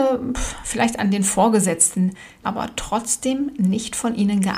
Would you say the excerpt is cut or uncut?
cut